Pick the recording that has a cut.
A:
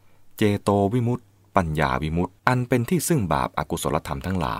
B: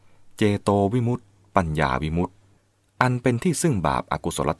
A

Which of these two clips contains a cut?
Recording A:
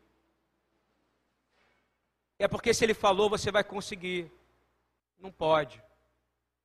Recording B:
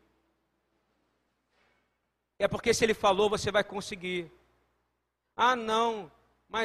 A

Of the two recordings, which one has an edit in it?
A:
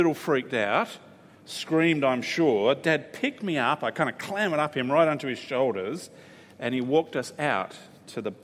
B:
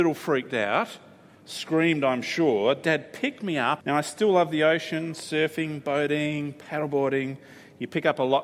B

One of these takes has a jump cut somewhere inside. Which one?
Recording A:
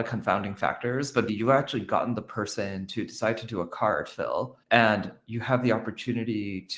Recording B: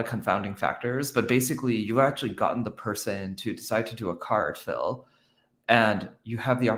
A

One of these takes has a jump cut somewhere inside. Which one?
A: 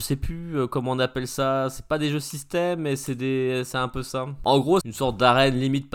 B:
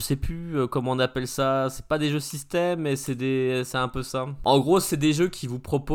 A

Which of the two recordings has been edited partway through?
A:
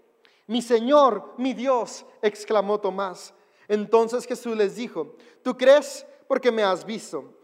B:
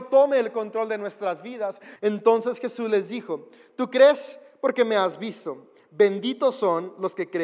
B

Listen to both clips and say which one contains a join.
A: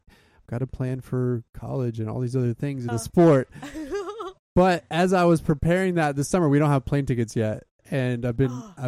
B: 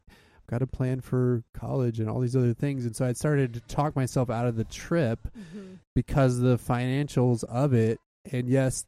A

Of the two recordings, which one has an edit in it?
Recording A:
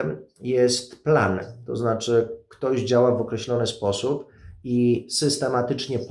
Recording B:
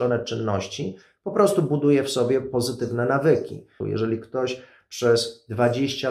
B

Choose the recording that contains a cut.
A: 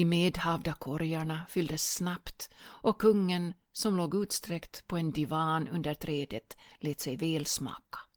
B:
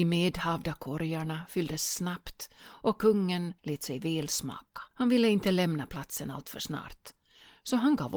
B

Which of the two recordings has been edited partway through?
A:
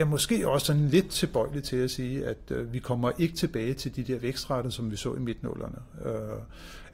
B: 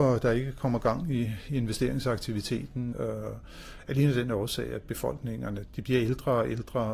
B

